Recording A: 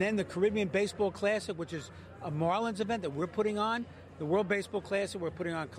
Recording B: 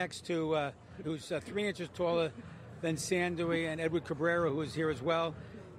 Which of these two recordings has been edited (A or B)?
B